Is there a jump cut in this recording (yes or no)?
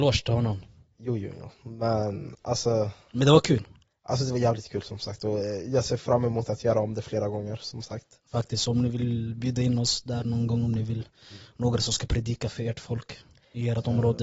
no